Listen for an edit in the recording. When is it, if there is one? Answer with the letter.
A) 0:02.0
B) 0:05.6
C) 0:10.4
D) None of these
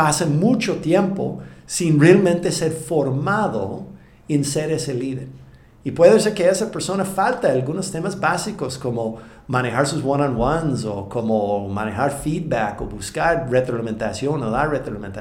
D